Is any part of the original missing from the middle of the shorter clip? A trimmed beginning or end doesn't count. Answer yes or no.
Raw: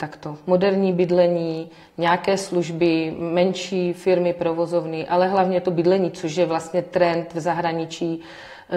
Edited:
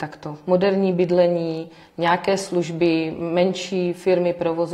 no